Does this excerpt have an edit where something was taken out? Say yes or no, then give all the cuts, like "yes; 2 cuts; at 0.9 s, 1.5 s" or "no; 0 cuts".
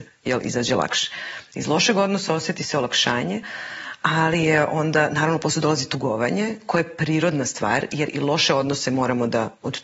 no; 0 cuts